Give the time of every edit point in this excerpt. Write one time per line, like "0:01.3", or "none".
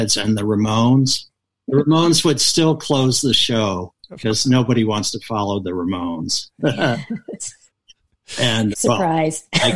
0:07.7
0:08.7